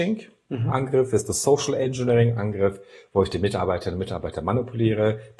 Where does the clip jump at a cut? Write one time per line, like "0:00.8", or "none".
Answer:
none